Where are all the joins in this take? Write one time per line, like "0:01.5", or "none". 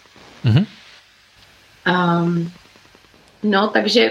none

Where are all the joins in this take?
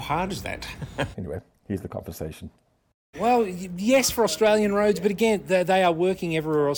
0:01.1
0:03.1

